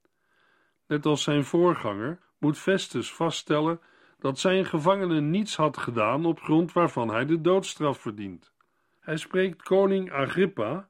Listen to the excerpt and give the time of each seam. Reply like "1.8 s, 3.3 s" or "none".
2.2 s, 9.0 s